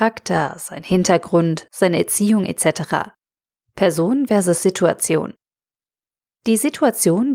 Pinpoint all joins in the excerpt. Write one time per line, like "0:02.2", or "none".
0:01.7
0:03.6